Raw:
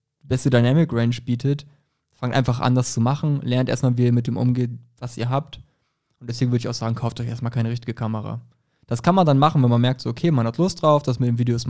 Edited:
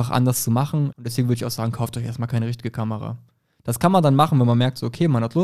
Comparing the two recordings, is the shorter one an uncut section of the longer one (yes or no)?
no